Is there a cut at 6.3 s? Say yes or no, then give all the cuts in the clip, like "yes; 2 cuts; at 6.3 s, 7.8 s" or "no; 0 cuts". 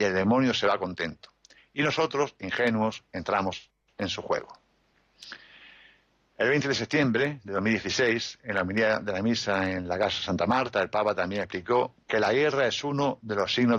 no; 0 cuts